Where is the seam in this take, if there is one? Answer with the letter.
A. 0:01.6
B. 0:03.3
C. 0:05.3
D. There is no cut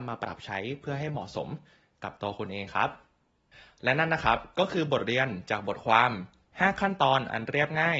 D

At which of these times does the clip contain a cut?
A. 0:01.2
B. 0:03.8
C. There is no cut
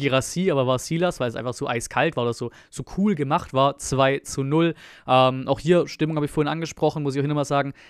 C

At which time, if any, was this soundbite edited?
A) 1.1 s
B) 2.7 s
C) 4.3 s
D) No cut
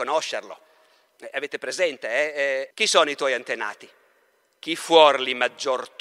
B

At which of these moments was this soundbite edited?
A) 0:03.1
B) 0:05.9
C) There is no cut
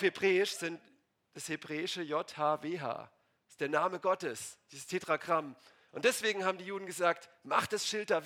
C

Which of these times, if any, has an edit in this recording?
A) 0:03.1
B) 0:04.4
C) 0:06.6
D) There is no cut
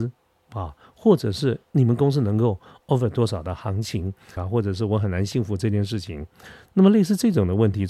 B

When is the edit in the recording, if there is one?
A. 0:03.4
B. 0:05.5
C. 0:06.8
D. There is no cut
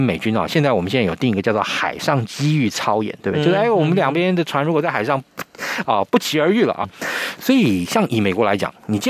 C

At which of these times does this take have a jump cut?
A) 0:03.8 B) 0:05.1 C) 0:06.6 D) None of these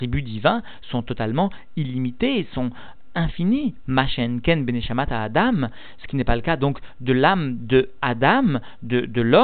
A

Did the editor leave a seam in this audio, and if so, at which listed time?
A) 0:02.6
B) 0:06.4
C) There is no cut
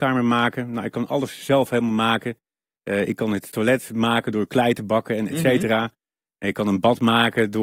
C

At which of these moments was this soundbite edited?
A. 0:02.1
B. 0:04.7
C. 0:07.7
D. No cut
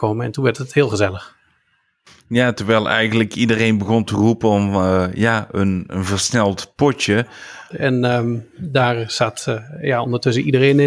C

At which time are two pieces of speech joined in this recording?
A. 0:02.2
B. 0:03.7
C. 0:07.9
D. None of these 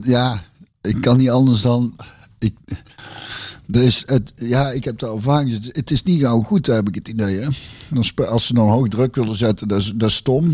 D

